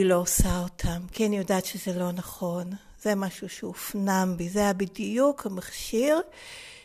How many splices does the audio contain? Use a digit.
0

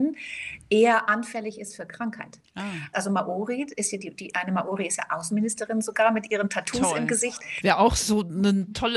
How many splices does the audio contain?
2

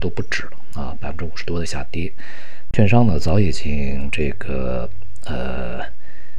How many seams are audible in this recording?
1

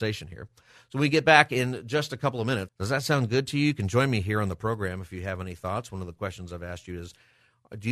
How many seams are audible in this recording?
1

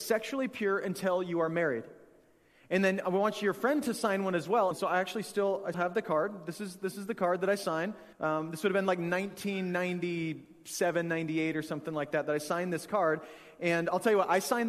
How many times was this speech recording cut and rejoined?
3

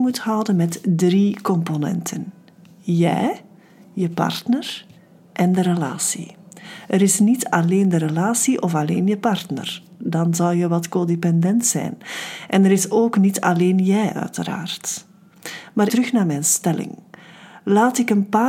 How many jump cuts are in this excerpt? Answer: 1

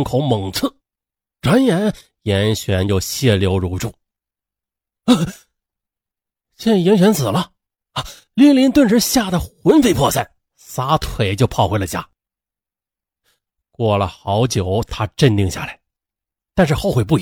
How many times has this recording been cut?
0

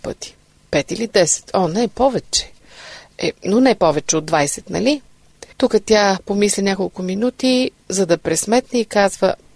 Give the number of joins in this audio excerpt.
1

